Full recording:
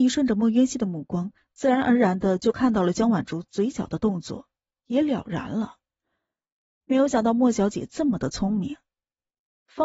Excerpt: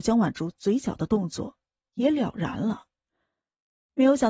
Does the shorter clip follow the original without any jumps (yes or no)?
yes